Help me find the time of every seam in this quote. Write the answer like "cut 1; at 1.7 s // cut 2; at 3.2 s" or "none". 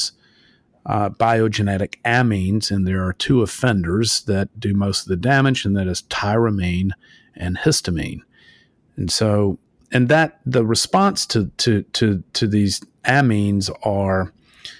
none